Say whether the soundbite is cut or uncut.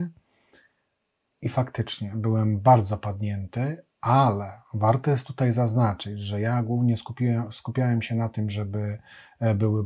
uncut